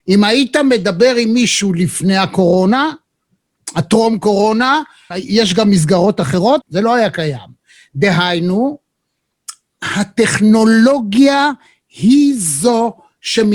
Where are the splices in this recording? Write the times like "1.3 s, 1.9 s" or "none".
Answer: 5.1 s, 6.6 s